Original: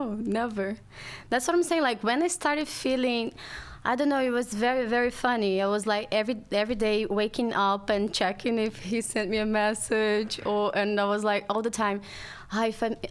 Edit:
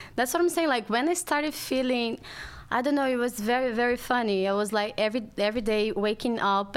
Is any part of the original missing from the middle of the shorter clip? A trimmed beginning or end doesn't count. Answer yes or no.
no